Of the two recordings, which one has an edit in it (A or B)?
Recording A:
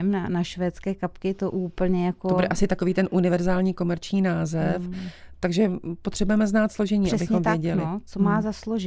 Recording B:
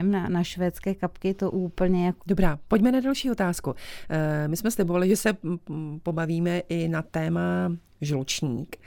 B